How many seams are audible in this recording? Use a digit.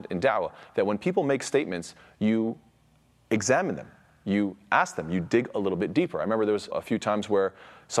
1